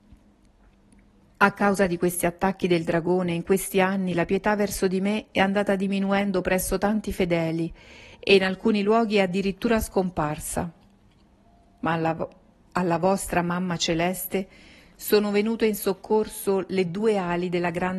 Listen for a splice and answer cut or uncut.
uncut